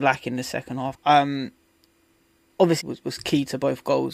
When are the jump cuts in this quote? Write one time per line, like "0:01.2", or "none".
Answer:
0:00.9
0:02.8